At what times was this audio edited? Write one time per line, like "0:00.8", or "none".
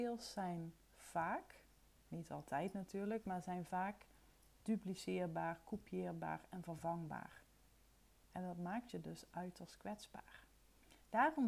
none